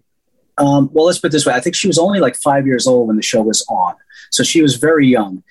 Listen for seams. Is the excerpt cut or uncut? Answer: uncut